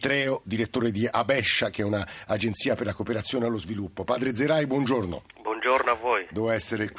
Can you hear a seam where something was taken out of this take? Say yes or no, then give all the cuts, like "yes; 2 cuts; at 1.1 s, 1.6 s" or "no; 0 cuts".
no; 0 cuts